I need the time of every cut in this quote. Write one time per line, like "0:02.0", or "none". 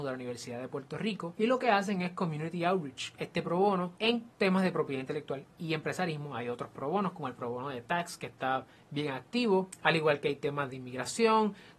0:03.2